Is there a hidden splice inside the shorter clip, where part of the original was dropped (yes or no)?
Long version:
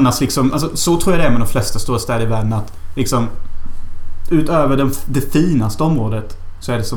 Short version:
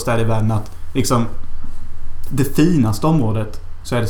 yes